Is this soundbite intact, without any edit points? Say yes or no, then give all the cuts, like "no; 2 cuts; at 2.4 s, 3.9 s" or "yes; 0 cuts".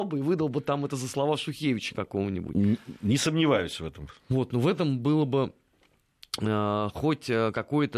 yes; 0 cuts